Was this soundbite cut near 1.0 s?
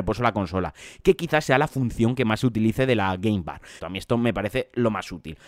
no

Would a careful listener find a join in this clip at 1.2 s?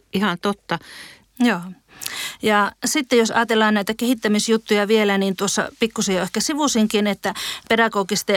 yes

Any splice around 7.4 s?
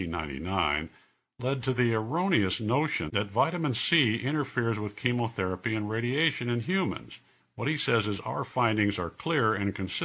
yes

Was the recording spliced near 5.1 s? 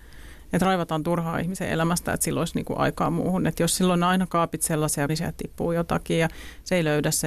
yes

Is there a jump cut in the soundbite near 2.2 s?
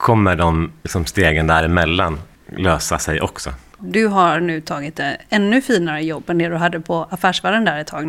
no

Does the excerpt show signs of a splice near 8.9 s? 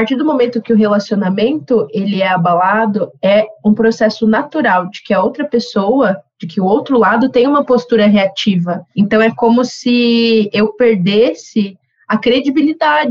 no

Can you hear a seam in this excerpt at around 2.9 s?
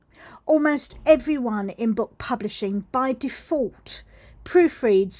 no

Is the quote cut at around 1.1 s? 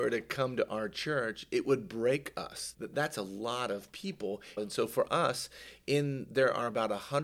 no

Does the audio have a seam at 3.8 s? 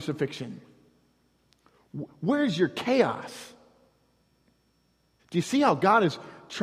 no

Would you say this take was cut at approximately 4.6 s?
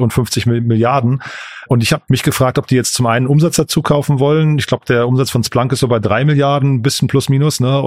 no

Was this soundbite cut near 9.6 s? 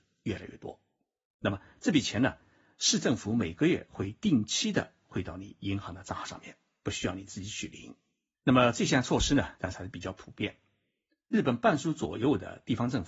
yes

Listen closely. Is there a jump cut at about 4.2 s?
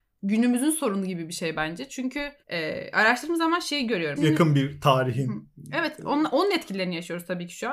yes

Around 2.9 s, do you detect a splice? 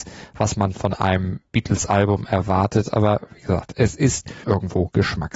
no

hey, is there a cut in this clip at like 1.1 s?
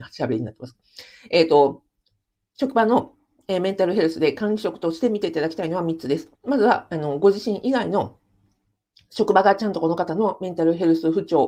no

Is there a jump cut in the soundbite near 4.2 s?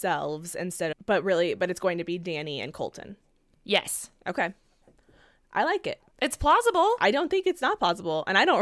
no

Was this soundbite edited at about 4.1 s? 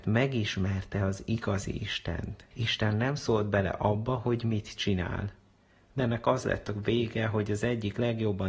no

